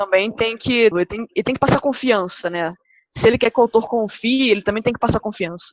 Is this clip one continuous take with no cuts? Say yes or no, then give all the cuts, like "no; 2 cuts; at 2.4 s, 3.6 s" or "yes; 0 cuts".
no; 1 cut; at 0.9 s